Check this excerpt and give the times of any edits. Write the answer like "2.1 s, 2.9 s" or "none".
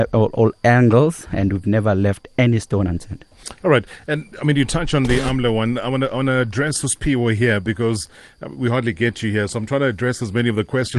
none